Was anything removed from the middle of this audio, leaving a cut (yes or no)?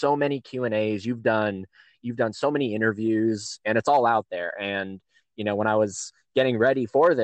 no